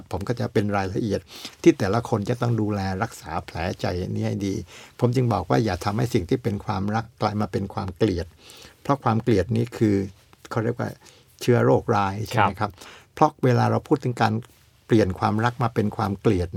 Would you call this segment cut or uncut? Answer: uncut